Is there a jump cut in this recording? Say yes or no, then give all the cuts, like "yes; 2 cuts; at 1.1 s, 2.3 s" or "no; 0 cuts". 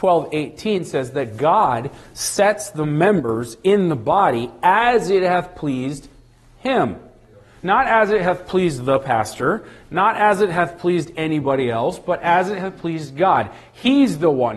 no; 0 cuts